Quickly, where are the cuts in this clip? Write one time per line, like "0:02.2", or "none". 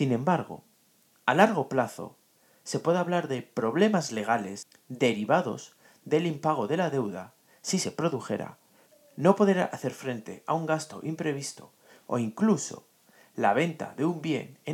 none